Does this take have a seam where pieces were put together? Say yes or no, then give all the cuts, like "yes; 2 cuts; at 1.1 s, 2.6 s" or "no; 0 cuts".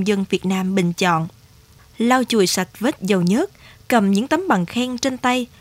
no; 0 cuts